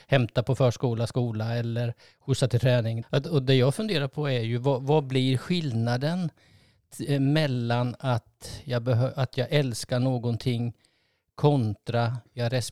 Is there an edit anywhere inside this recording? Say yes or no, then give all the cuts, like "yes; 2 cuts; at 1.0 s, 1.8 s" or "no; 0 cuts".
yes; 1 cut; at 3.0 s